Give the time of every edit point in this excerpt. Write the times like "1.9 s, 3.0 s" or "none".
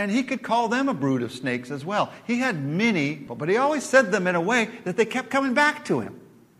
3.3 s